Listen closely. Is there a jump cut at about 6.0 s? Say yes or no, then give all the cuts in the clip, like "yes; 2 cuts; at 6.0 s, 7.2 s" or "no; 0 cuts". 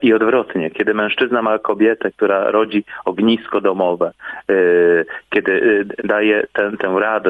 yes; 1 cut; at 6.0 s